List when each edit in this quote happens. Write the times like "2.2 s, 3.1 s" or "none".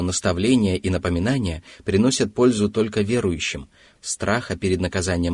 4.0 s